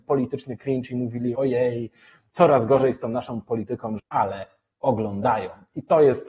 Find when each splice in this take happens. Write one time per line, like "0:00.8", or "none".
0:01.3
0:04.0